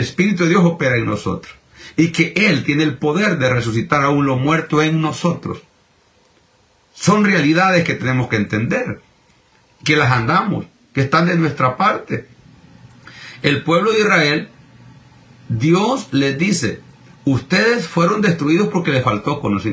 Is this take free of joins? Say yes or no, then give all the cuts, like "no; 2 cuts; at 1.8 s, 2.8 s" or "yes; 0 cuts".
yes; 0 cuts